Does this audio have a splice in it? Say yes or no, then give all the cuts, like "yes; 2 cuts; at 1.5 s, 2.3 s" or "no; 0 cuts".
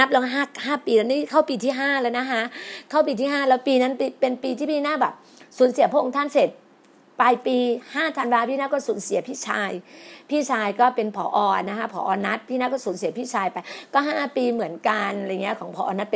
no; 0 cuts